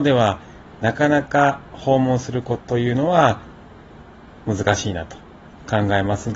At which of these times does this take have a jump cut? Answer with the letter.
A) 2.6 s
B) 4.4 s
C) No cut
A